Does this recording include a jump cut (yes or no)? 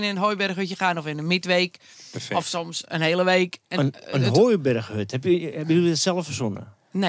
no